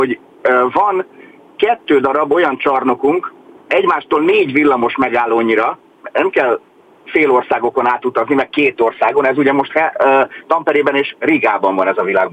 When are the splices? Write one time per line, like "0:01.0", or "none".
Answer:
none